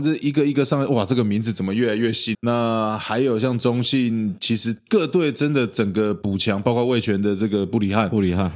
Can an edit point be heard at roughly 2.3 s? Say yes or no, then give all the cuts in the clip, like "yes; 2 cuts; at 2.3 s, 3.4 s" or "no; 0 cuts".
yes; 1 cut; at 2.3 s